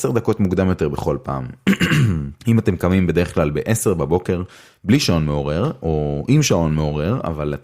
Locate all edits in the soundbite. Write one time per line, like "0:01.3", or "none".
0:02.4